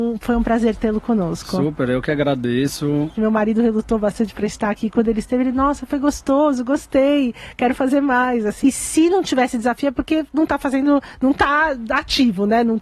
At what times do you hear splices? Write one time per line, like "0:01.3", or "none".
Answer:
0:03.1
0:08.6